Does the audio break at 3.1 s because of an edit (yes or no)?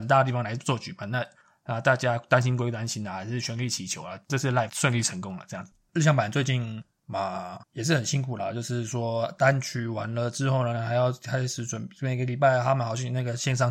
no